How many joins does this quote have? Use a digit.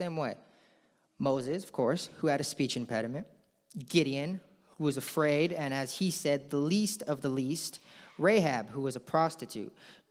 0